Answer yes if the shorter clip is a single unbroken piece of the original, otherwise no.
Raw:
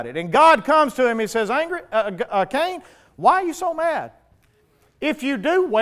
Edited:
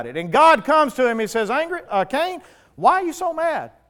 no